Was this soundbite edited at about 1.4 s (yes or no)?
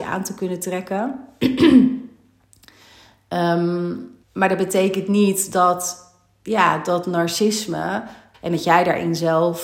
no